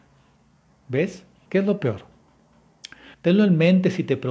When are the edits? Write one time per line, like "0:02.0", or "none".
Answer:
0:01.5
0:03.1